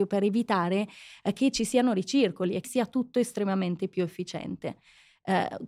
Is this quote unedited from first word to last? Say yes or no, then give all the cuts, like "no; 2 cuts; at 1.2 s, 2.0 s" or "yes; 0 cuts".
no; 1 cut; at 2.6 s